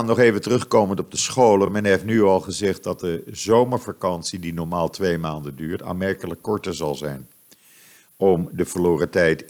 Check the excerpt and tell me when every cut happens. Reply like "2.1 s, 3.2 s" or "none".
none

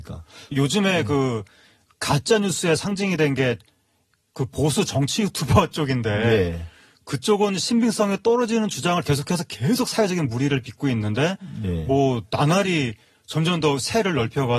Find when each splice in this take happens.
none

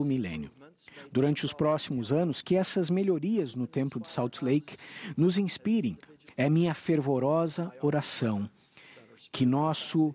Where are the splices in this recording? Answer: 6.3 s

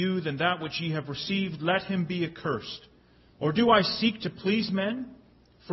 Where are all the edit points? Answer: 3.3 s

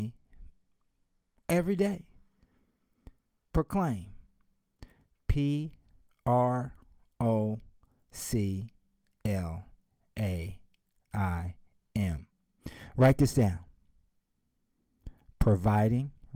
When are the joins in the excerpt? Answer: none

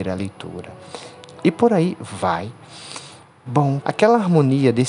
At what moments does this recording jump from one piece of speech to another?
1.4 s, 3.8 s

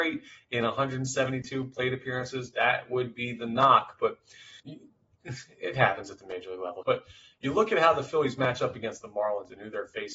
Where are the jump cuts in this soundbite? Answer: 4.6 s, 6.8 s

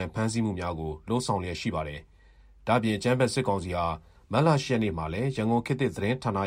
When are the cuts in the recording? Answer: none

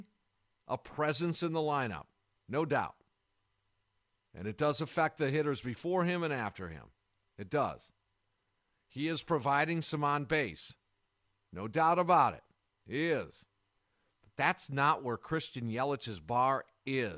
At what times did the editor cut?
none

